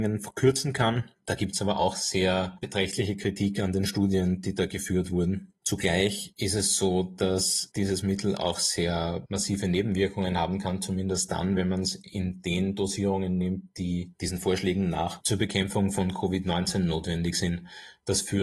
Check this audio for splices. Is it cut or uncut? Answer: uncut